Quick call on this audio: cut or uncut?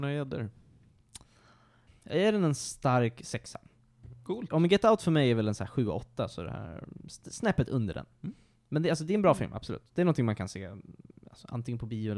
cut